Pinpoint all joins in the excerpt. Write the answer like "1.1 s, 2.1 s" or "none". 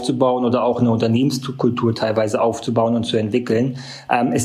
none

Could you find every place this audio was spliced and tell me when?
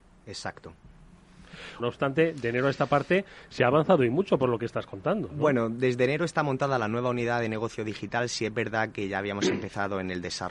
1.8 s

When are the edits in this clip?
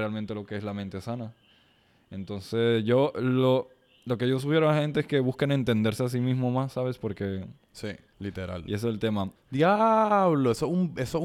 8.1 s, 9.4 s

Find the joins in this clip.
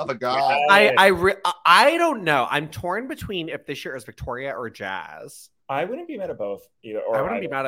5.6 s

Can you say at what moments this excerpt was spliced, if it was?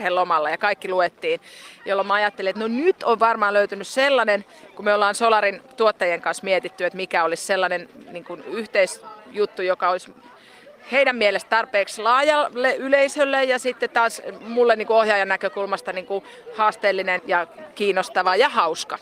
17.2 s

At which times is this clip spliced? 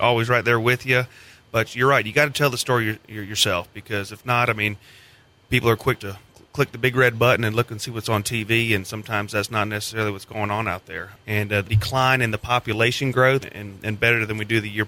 6.0 s, 11.6 s, 13.4 s

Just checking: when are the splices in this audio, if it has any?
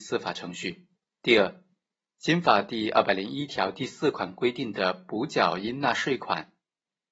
1.0 s

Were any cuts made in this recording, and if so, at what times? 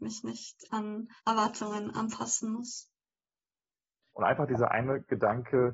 1.2 s, 4.1 s

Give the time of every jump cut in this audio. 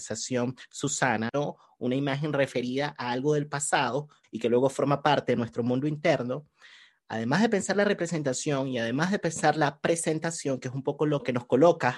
1.3 s

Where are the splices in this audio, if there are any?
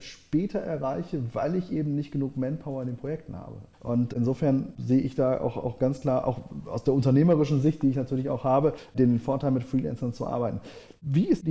3.7 s

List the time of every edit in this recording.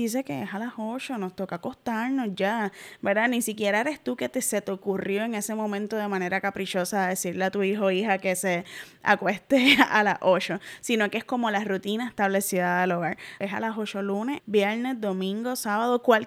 13.4 s, 14.4 s

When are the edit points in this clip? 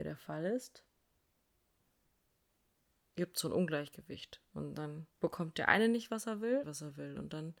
5.1 s, 6.6 s

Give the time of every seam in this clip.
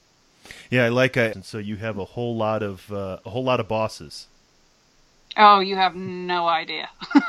1.3 s

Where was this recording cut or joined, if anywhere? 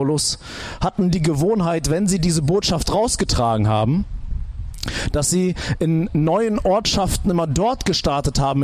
none

